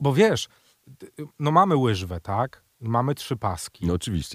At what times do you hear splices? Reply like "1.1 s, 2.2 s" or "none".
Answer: none